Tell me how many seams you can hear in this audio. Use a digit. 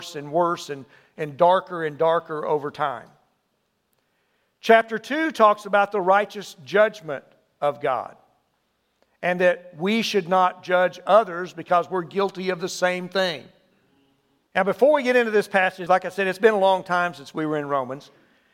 2